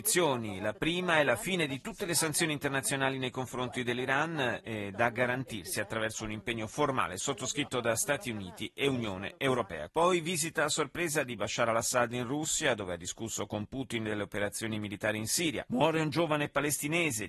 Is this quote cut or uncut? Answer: cut